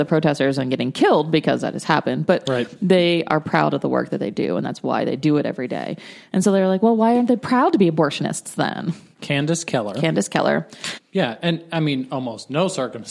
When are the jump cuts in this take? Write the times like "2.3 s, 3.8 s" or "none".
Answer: 9.2 s, 11.0 s